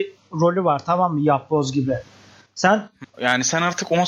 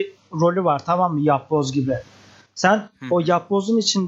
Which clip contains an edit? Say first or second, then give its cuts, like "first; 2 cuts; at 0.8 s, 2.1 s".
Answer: first; 1 cut; at 3.0 s